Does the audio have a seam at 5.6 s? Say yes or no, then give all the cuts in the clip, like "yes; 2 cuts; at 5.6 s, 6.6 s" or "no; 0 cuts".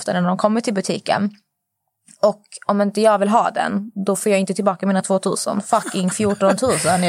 yes; 1 cut; at 5.6 s